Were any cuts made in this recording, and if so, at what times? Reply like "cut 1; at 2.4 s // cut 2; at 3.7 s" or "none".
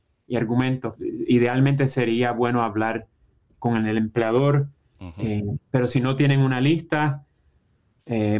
cut 1; at 1.0 s

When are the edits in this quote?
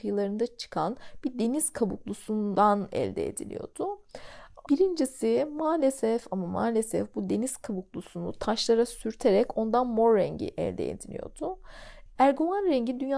cut 1; at 4.7 s // cut 2; at 12.2 s

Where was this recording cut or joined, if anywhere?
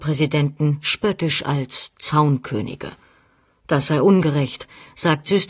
none

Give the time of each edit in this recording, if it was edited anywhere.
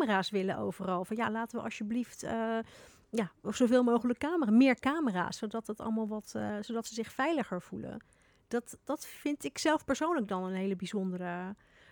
none

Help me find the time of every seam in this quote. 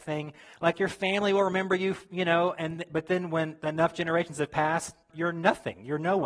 cut 1; at 5.1 s

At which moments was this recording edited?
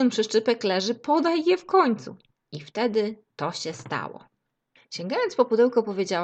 cut 1; at 4.8 s

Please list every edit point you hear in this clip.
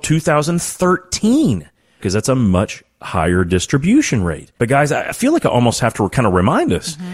cut 1; at 2.0 s // cut 2; at 4.6 s

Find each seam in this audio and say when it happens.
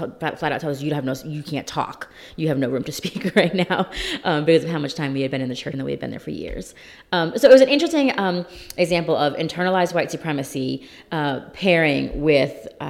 cut 1; at 5.7 s

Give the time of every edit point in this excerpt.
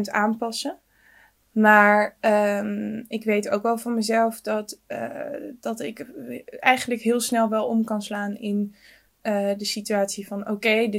none

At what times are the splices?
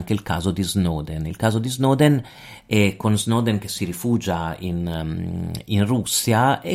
none

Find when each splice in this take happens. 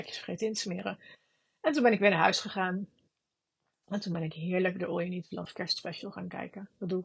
none

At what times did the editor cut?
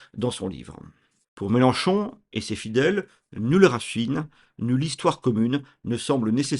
cut 1; at 1.3 s // cut 2; at 4.5 s

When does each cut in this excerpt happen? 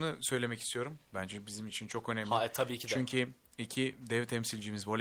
none

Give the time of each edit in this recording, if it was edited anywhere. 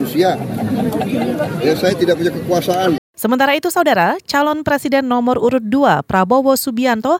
cut 1; at 3.0 s

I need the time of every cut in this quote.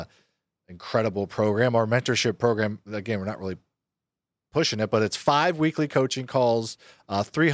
none

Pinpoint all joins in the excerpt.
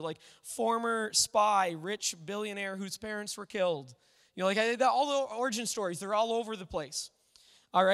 none

